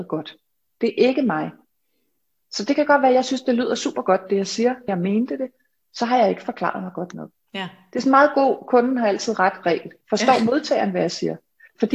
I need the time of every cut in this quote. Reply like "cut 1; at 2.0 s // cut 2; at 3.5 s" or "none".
cut 1; at 4.9 s // cut 2; at 10.0 s